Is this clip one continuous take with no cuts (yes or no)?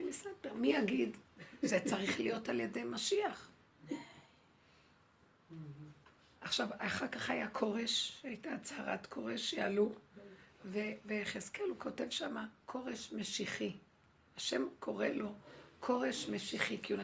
yes